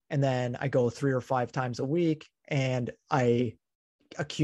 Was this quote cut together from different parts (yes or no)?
no